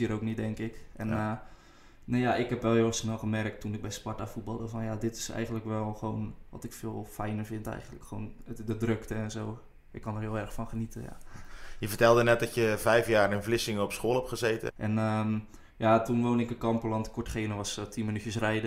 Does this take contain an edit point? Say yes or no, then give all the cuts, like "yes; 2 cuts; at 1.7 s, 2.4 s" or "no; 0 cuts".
yes; 1 cut; at 14.7 s